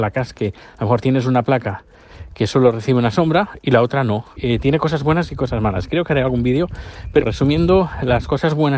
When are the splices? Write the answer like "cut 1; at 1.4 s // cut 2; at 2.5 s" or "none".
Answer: cut 1; at 4.4 s // cut 2; at 7.2 s